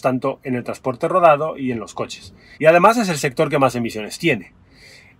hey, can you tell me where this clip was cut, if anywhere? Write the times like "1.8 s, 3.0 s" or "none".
2.5 s